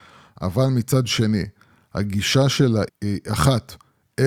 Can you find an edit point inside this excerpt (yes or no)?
yes